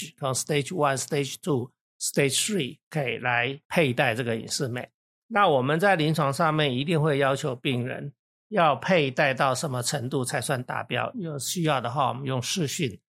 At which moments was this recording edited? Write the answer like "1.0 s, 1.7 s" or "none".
11.1 s